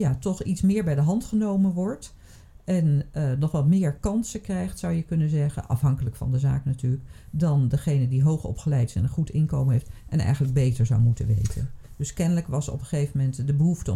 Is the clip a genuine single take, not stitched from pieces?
no; 1 cut; at 11.8 s

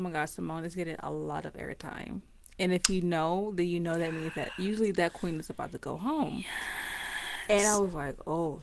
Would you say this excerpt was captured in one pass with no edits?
yes; 0 cuts

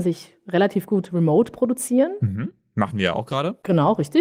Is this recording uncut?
yes; 0 cuts

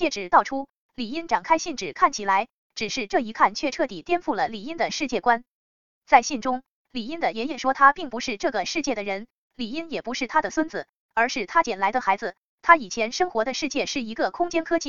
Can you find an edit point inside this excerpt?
no; 0 cuts

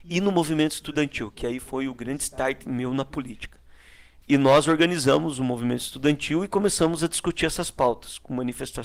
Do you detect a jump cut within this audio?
yes; 1 cut; at 4.2 s

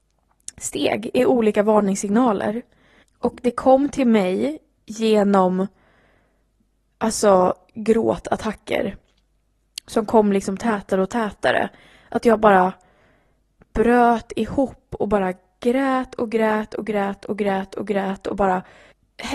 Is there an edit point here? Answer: no; 0 cuts

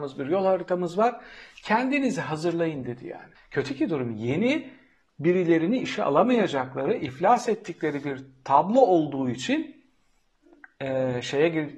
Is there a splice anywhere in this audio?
yes; 1 cut; at 3.4 s

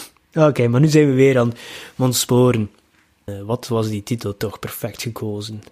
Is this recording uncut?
yes; 0 cuts

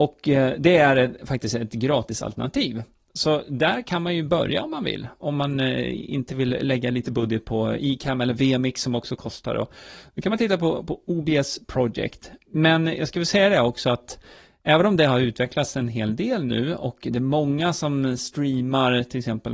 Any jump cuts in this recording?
no; 0 cuts

